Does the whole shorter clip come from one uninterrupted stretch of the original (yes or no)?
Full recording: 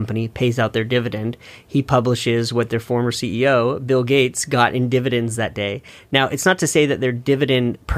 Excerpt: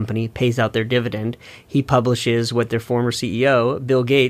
yes